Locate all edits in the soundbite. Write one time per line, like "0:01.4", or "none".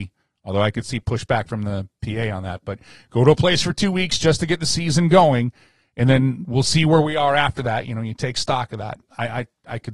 none